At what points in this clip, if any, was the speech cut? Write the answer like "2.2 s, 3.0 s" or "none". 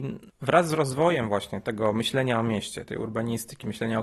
none